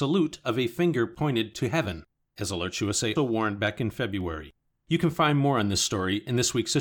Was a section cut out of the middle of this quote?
yes; 2 cuts; at 3.2 s, 4.7 s

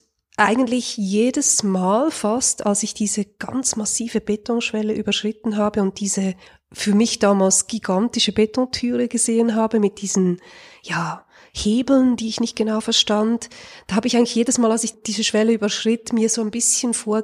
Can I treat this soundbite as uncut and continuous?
yes; 0 cuts

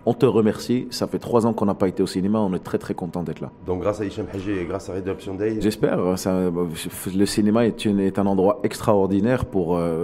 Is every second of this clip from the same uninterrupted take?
no; 1 cut; at 5.6 s

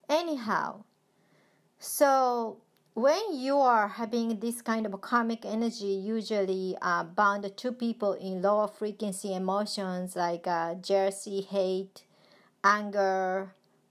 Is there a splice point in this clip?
no; 0 cuts

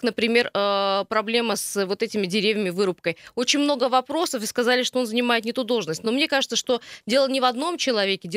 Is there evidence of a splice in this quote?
no; 0 cuts

